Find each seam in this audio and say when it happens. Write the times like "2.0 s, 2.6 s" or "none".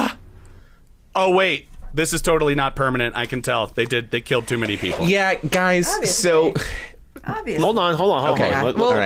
none